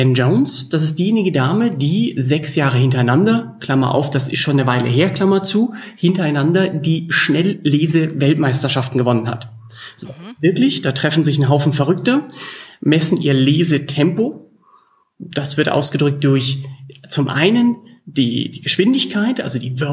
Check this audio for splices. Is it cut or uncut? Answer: uncut